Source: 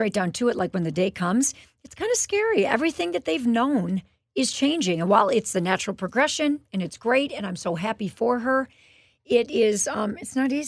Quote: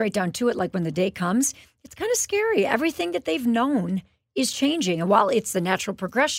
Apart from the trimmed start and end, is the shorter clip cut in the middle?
no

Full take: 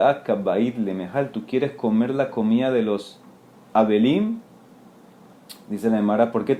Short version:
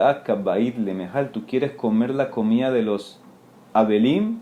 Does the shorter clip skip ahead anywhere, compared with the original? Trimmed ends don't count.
no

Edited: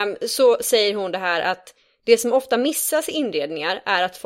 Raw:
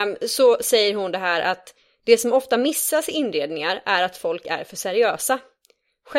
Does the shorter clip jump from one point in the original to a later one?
no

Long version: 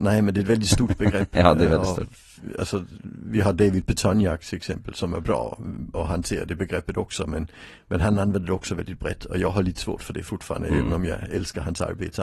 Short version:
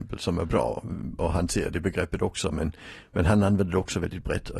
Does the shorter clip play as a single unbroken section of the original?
yes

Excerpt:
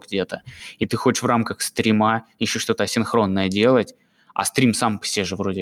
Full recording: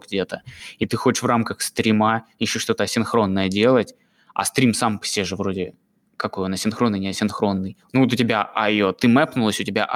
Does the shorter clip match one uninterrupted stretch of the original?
yes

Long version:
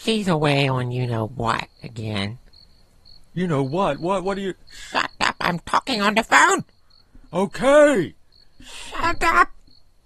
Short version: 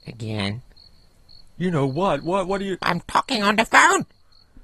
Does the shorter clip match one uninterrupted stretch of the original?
no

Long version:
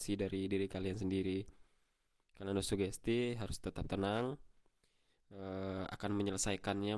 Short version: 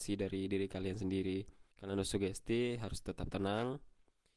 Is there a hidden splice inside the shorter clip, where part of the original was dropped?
yes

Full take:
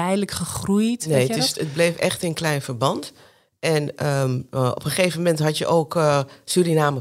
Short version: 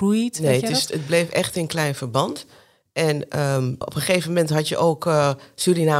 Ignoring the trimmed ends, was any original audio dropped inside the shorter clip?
yes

